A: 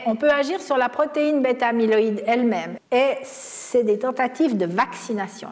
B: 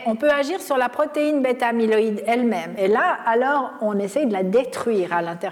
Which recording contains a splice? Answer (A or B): A